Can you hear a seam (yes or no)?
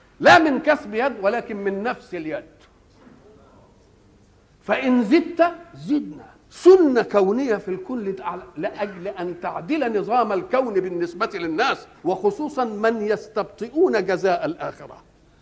yes